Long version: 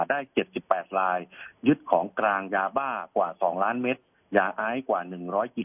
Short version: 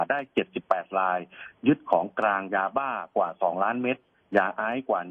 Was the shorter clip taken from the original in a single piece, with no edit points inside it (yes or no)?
yes